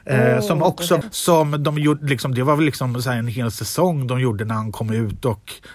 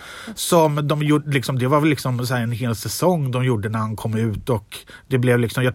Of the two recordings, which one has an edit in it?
first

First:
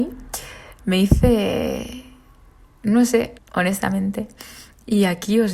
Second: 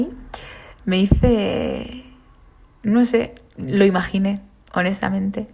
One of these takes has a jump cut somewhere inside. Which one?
first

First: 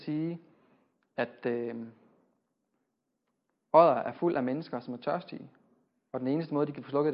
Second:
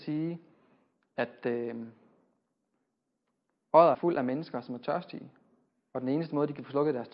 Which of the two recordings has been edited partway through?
second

